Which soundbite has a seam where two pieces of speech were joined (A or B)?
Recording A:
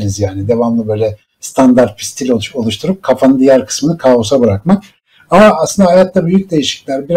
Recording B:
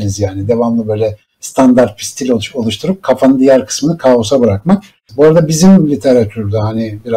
B